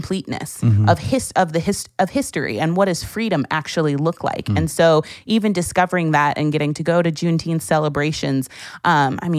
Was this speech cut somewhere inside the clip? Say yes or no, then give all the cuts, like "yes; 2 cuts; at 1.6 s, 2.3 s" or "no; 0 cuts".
no; 0 cuts